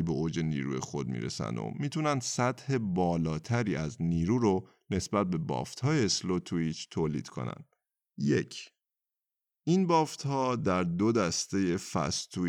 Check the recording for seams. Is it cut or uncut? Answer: cut